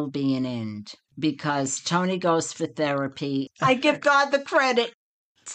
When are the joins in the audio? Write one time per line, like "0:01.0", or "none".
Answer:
0:01.1
0:03.5